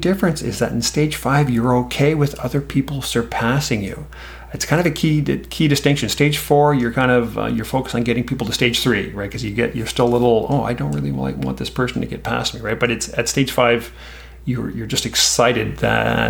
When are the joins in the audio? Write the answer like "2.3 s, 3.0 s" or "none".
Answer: none